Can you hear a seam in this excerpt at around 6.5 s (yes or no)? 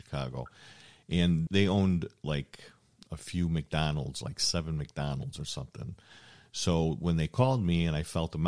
no